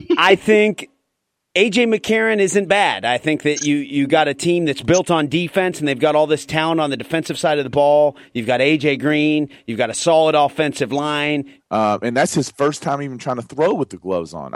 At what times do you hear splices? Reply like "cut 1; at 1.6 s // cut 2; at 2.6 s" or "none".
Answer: cut 1; at 11.6 s